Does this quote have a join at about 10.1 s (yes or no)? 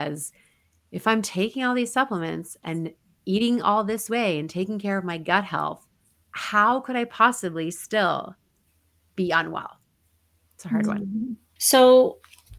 no